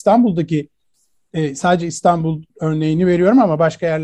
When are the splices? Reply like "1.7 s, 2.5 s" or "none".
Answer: 2.5 s